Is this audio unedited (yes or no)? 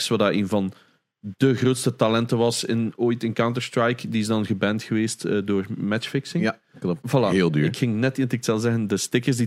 no